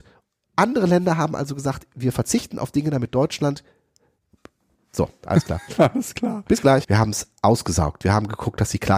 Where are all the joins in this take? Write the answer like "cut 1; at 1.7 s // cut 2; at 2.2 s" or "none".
cut 1; at 6.8 s